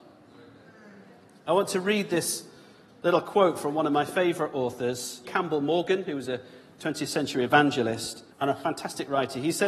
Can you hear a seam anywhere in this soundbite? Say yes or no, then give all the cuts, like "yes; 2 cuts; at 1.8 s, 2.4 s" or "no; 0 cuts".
yes; 2 cuts; at 5.2 s, 8.3 s